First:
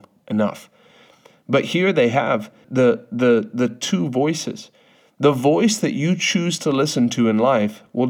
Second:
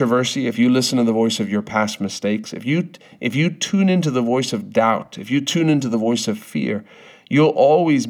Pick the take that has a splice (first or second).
first